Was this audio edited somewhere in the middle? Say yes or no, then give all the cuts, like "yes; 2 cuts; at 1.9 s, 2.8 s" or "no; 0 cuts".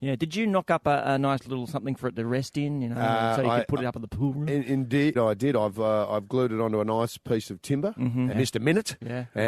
yes; 2 cuts; at 5.1 s, 8.3 s